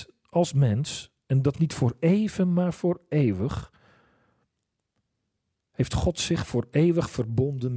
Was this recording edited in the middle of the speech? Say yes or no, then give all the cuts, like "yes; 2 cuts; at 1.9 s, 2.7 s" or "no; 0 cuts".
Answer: no; 0 cuts